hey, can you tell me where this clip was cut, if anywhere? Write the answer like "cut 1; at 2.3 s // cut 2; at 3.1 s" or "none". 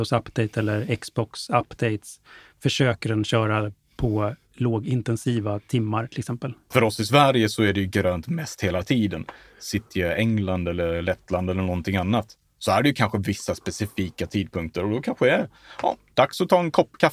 cut 1; at 6.7 s